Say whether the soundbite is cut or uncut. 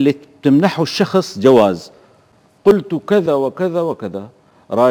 cut